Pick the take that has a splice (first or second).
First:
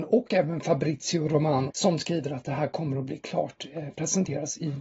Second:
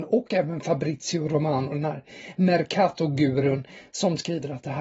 first